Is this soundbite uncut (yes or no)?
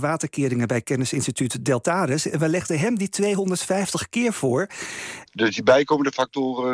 no